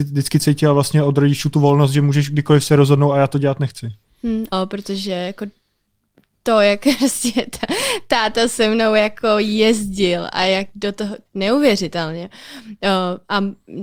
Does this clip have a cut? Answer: yes; 2 cuts; at 4.5 s, 11.3 s

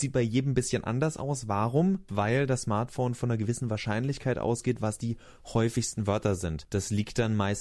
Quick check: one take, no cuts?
yes; 0 cuts

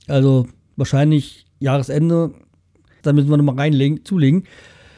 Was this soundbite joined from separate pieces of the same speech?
yes; 1 cut; at 3.0 s

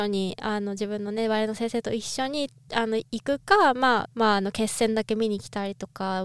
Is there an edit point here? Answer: yes; 1 cut; at 4.0 s

